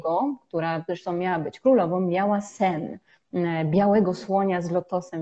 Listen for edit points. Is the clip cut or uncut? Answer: uncut